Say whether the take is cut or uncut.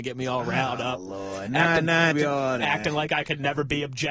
cut